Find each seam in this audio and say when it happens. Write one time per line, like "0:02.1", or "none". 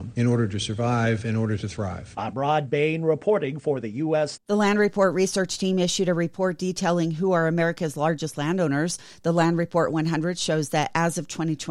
0:04.4